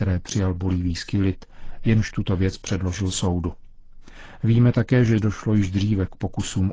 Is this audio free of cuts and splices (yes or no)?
yes